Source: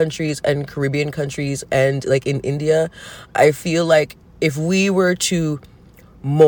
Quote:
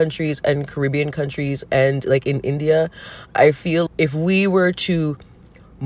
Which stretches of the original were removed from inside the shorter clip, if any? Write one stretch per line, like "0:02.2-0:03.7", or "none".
0:03.9-0:04.3